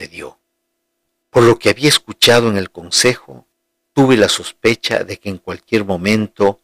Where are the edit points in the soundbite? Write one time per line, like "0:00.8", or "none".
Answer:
0:01.2